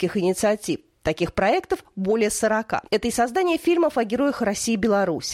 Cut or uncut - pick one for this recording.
cut